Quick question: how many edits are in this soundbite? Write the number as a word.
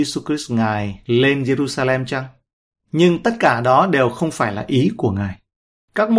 zero